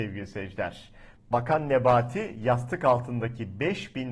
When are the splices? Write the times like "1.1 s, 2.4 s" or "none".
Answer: 1.2 s